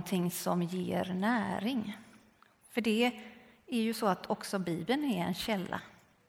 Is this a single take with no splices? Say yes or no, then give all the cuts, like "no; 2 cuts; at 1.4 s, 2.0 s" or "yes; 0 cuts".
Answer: no; 1 cut; at 2.5 s